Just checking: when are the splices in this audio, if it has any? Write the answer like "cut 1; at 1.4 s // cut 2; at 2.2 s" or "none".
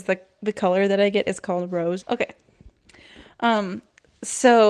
cut 1; at 2.0 s

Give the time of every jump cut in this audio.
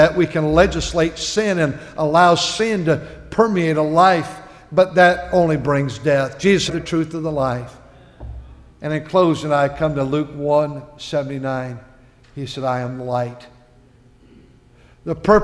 cut 1; at 6.7 s

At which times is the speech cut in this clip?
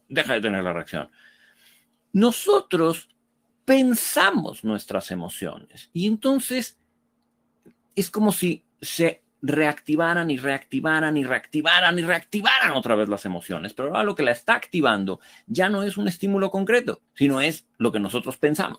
cut 1; at 8.7 s // cut 2; at 17.1 s

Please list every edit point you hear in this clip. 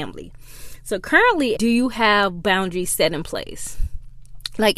cut 1; at 1.5 s

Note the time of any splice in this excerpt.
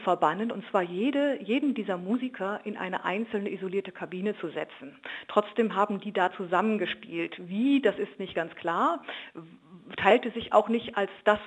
none

